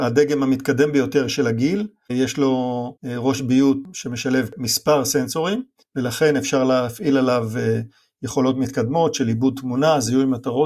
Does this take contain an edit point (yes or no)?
yes